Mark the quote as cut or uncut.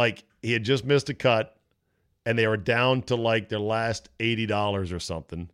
uncut